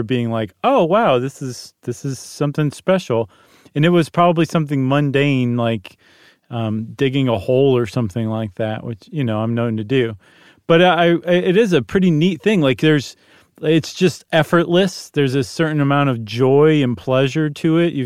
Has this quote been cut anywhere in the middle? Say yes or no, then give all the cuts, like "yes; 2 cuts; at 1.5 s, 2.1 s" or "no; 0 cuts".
no; 0 cuts